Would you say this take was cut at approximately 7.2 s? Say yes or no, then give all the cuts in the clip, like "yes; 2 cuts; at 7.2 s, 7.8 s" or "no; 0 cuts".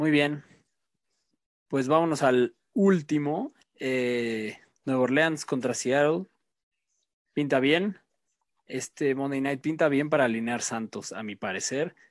no; 1 cut; at 3.6 s